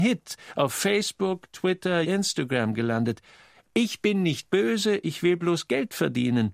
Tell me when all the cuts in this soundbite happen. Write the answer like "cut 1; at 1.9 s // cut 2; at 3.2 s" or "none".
cut 1; at 2.0 s